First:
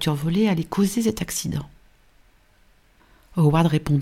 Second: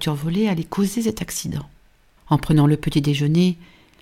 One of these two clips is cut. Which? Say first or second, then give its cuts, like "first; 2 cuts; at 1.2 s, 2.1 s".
second; 1 cut; at 2.2 s